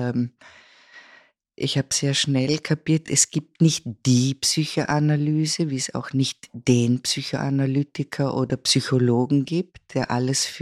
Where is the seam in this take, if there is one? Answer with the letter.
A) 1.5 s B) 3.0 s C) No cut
C